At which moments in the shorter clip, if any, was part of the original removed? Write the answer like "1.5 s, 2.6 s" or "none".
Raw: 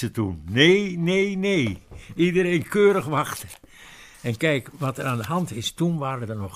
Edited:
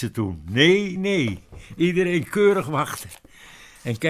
1.0 s